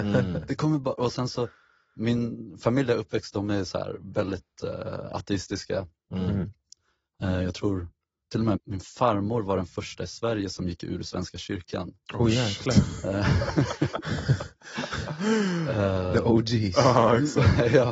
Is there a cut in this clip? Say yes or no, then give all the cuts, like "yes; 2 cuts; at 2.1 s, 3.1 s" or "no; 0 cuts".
yes; 1 cut; at 8.6 s